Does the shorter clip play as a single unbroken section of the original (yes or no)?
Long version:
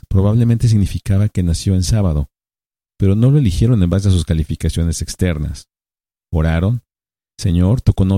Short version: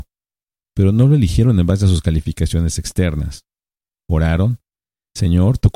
yes